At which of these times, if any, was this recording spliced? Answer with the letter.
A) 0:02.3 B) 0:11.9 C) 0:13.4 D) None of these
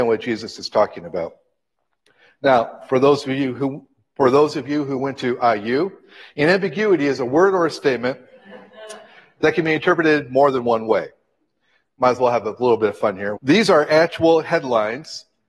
C